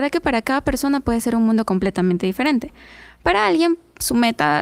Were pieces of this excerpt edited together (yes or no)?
no